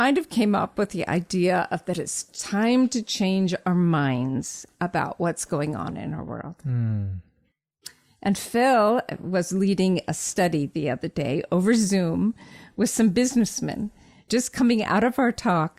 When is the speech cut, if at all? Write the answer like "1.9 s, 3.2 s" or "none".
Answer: 14.3 s